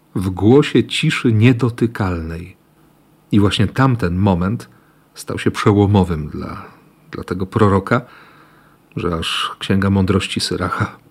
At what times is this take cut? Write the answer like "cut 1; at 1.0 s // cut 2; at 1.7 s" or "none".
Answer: none